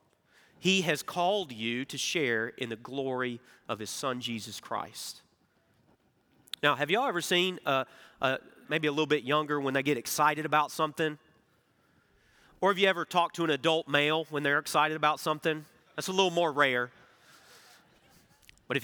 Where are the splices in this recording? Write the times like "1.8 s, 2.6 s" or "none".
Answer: 8.6 s